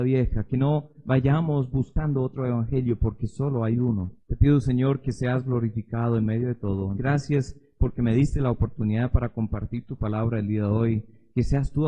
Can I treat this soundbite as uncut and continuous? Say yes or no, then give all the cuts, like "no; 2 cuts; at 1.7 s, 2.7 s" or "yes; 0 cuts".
no; 2 cuts; at 4.2 s, 7.0 s